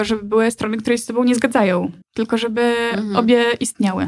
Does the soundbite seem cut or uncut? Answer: cut